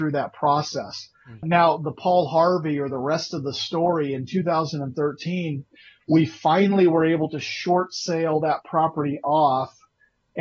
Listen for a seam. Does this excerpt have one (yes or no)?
no